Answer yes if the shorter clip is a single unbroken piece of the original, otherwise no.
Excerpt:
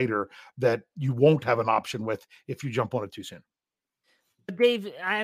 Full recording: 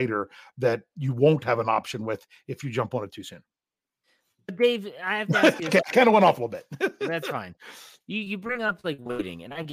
yes